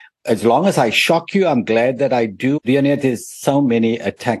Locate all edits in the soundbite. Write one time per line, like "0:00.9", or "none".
0:02.6